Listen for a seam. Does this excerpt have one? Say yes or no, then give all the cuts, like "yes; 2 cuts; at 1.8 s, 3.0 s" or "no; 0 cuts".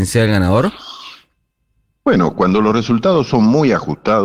no; 0 cuts